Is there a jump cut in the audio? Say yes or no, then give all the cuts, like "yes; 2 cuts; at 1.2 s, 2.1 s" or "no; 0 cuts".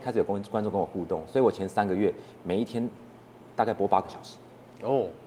no; 0 cuts